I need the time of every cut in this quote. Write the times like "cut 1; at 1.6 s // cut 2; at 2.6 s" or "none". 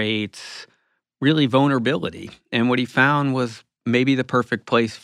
none